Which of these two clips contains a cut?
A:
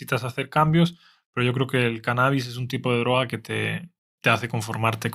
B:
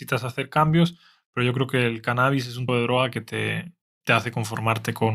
B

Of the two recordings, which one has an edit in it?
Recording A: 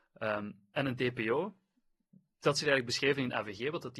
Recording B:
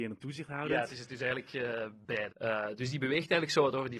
B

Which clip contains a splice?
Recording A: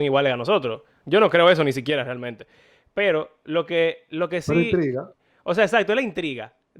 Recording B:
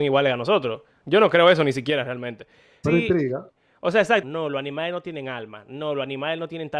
B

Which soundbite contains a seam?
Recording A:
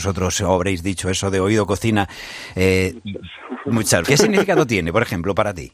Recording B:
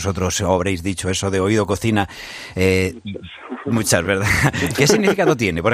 A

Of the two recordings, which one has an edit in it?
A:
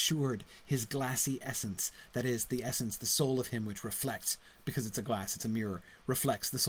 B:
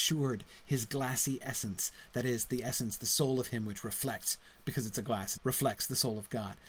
B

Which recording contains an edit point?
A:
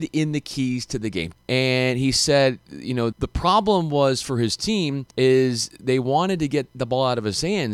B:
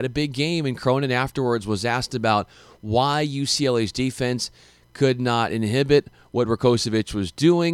A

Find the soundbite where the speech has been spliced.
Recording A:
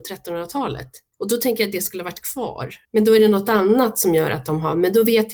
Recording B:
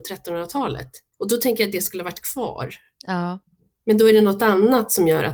A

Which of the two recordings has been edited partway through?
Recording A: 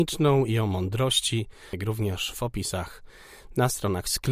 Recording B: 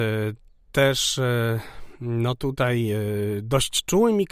A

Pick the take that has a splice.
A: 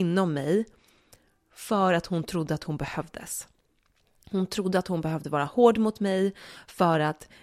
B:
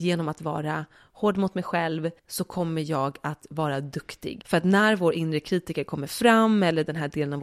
B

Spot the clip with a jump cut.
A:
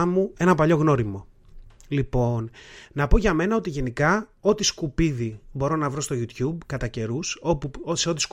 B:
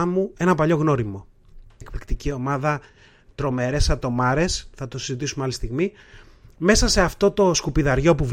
B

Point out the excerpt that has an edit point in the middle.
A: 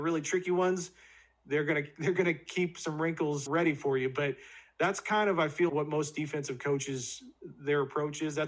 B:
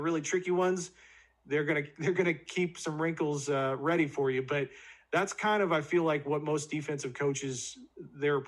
A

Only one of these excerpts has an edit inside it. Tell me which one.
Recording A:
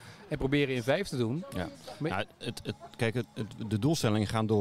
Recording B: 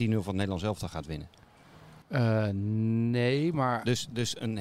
B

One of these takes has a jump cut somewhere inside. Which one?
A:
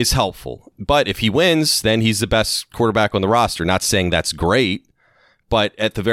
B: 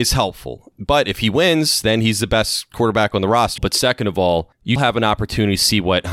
B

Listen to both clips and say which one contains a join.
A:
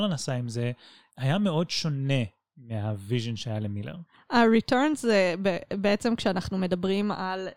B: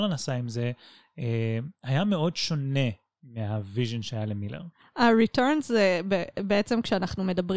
A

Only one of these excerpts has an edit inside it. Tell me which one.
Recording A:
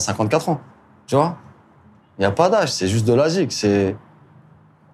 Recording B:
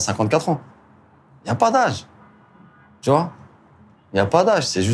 A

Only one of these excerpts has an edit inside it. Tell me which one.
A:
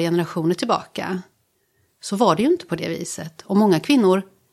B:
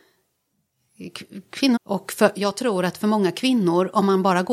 B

